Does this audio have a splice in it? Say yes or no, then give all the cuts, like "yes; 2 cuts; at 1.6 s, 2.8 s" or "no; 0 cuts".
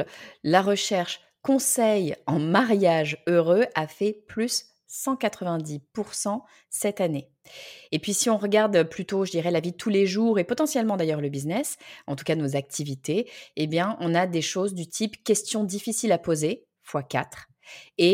no; 0 cuts